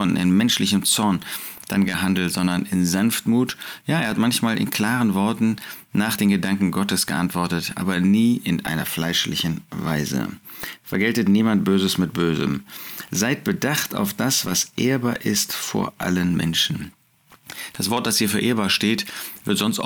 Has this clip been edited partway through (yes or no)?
no